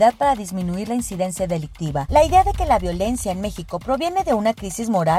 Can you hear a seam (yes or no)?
yes